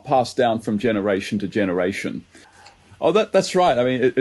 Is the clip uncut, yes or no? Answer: no